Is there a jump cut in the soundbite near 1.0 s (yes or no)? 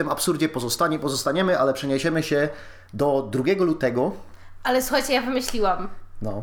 no